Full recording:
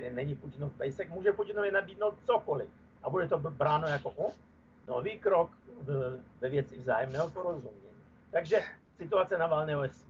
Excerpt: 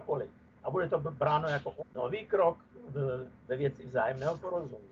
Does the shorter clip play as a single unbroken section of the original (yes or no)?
no